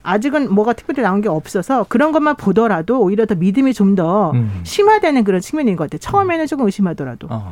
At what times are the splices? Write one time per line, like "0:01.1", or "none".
none